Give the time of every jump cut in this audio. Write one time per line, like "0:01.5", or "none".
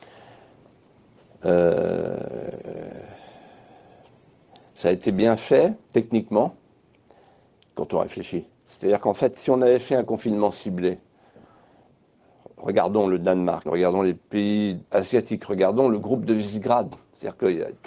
0:07.6
0:13.7
0:14.9

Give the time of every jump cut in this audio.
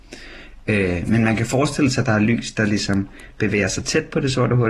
none

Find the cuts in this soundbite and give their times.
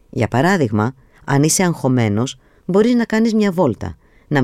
none

